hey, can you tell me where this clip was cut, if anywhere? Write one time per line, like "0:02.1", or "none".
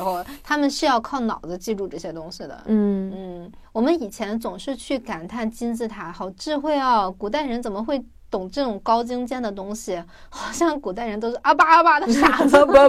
none